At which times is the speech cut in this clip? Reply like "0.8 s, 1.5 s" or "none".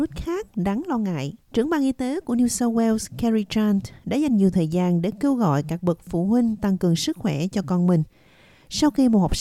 1.4 s